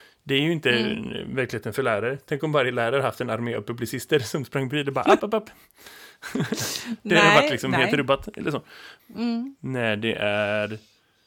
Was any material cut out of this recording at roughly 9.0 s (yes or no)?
yes